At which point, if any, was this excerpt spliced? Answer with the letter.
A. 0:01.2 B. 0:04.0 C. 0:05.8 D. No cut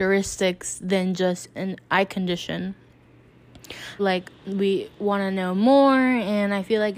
B